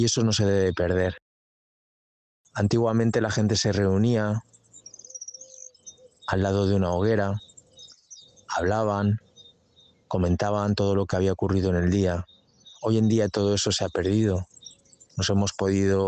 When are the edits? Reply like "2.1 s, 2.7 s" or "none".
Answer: 15.1 s

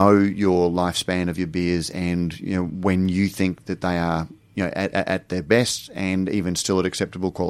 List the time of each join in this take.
none

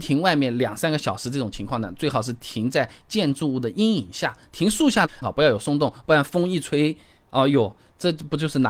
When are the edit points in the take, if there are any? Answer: 5.2 s

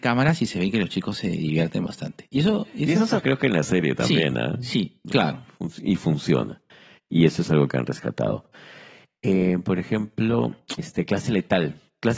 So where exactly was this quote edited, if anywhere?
3.2 s, 5.0 s, 10.8 s

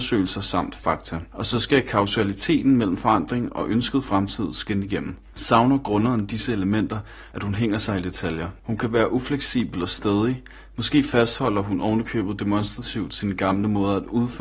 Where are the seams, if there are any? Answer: 7.3 s

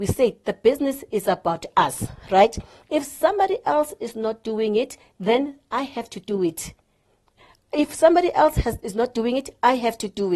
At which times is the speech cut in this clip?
none

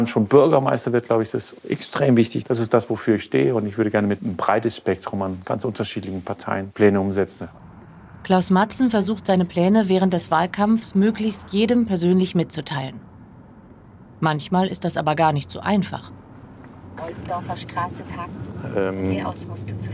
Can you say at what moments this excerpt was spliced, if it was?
2.4 s

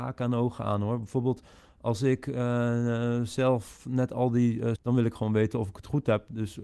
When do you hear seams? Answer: 4.8 s

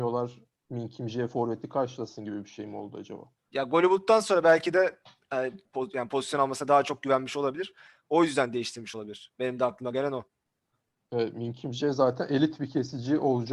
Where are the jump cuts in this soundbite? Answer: 5.7 s

